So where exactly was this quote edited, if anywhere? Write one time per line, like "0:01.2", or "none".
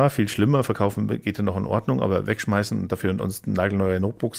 none